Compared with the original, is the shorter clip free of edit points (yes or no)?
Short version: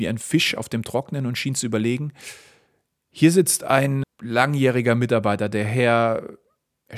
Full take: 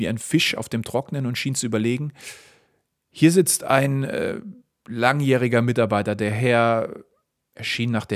no